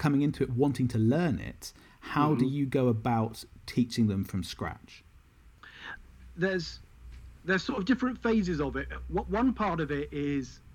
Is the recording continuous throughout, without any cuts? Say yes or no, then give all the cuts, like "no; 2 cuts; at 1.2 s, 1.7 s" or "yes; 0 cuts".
yes; 0 cuts